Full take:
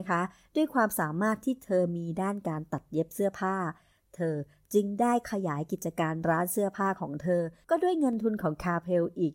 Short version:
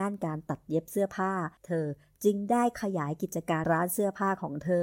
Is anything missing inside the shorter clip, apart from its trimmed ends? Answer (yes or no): yes